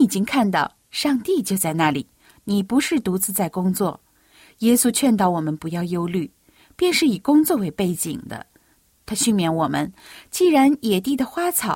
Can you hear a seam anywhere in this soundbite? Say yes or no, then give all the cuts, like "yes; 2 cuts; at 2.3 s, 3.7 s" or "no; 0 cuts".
no; 0 cuts